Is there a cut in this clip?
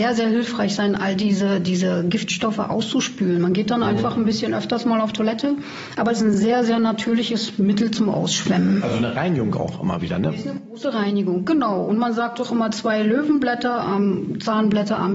no; 0 cuts

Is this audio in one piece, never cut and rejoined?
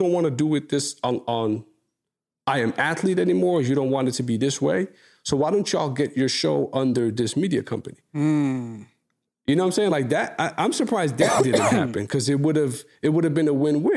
yes; 0 cuts

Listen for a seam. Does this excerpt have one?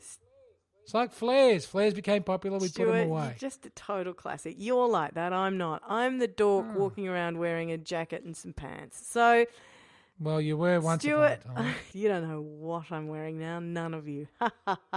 yes; 1 cut; at 11.9 s

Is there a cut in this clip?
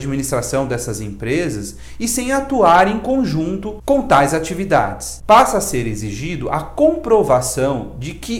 yes; 1 cut; at 5.2 s

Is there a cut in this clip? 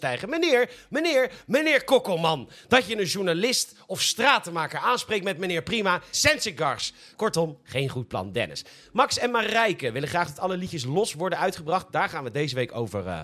yes; 1 cut; at 6.1 s

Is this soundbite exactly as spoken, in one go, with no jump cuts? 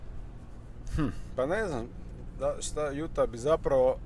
yes; 0 cuts

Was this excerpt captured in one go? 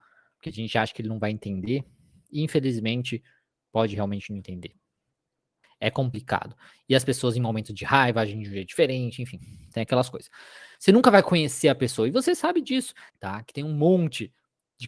no; 3 cuts; at 5.6 s, 10.7 s, 13.1 s

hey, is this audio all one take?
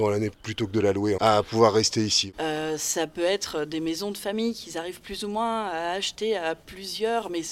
no; 2 cuts; at 1.2 s, 2.3 s

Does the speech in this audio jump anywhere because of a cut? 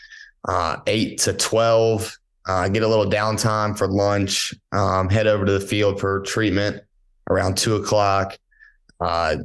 no; 0 cuts

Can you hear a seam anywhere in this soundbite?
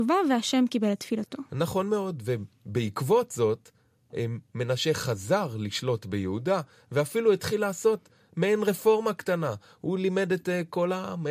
no; 0 cuts

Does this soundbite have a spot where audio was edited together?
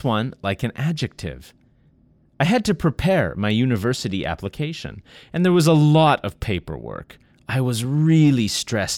no; 0 cuts

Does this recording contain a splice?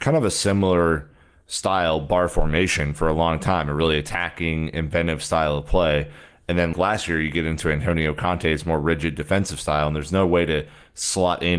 yes; 1 cut; at 6.7 s

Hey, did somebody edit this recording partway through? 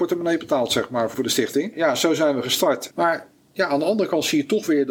yes; 2 cuts; at 1.1 s, 2.9 s

